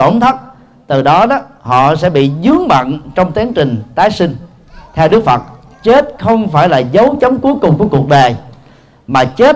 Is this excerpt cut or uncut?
cut